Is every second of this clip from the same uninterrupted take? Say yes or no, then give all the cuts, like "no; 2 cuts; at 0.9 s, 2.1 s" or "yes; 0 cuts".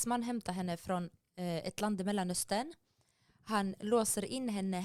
yes; 0 cuts